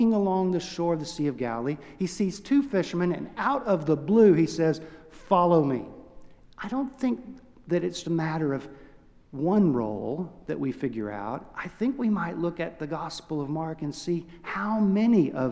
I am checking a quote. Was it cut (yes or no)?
yes